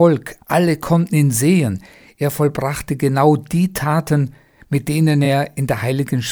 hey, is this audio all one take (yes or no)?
yes